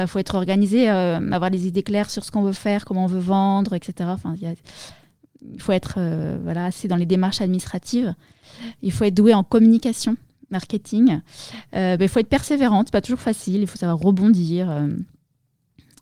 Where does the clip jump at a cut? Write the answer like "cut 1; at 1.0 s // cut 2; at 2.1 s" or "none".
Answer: none